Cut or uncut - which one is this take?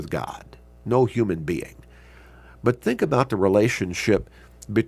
uncut